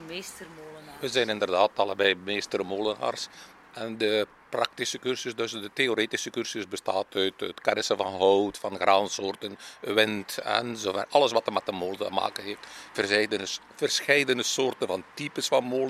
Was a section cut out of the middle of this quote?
no; 0 cuts

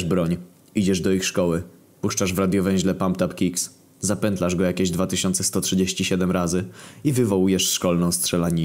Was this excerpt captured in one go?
yes; 0 cuts

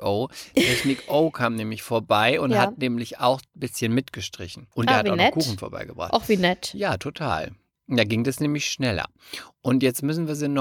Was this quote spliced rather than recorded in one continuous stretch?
yes; 1 cut; at 4.7 s

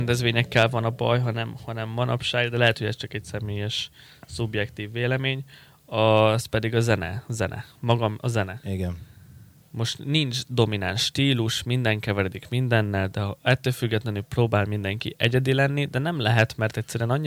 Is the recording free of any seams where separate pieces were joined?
yes; 0 cuts

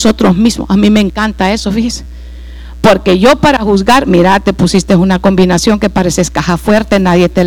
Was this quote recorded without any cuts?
yes; 0 cuts

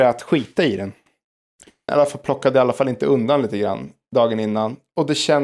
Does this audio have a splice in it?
yes; 1 cut; at 1.9 s

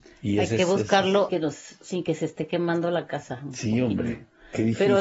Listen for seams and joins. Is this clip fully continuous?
no; 1 cut; at 1.3 s

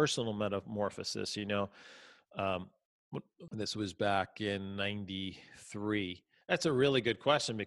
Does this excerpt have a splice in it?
yes; 2 cuts; at 3.5 s, 6.4 s

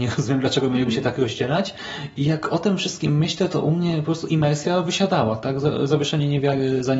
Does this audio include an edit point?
no; 0 cuts

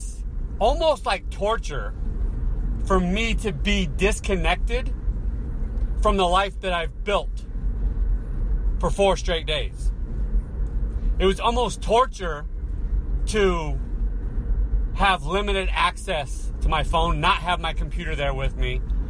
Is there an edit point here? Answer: no; 0 cuts

